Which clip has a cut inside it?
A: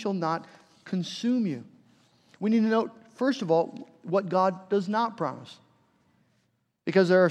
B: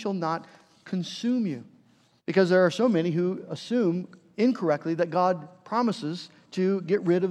B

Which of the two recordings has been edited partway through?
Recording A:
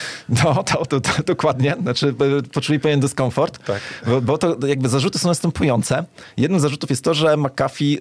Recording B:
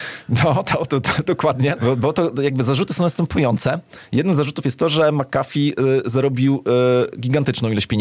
B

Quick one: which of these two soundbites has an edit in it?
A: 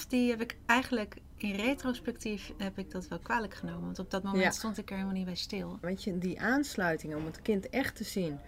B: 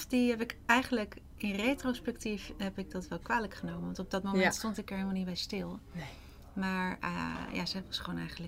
A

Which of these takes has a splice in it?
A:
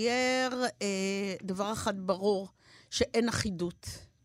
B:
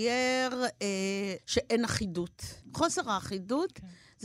B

